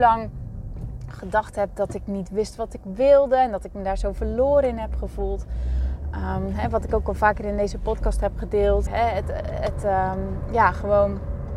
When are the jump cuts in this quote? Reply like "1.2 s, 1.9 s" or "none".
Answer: 8.9 s